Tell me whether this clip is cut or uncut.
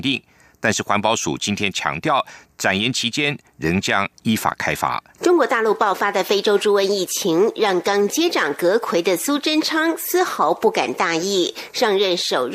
cut